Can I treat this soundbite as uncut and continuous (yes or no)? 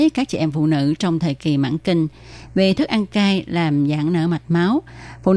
yes